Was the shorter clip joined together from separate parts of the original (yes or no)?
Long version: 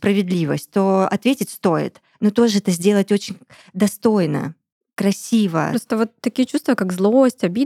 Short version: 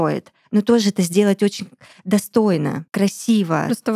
yes